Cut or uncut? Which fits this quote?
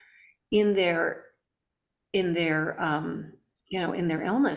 uncut